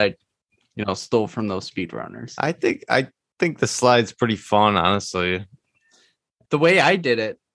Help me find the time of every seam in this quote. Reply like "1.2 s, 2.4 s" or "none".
6.5 s